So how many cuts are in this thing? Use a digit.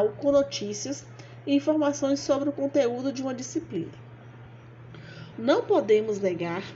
1